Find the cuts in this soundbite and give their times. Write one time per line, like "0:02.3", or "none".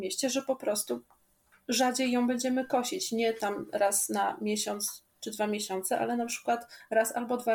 none